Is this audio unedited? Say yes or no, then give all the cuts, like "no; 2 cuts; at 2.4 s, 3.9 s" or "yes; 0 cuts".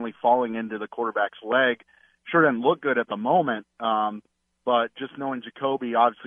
yes; 0 cuts